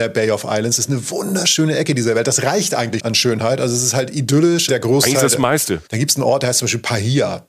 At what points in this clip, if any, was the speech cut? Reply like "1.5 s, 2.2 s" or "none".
3.0 s, 4.7 s, 5.9 s